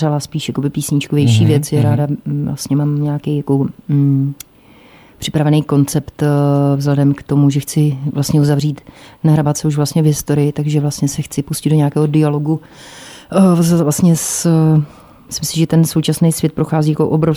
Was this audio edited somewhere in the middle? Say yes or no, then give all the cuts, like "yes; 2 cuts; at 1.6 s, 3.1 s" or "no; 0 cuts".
no; 0 cuts